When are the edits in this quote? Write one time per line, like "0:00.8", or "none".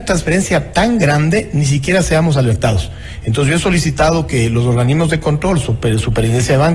none